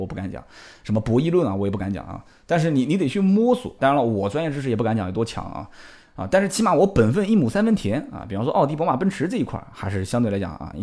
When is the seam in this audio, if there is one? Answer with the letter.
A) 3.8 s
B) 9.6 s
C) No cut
A